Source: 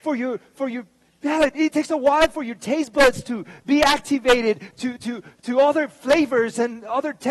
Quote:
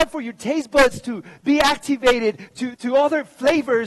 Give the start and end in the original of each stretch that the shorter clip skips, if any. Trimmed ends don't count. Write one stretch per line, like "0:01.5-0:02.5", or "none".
0:05.0-0:05.4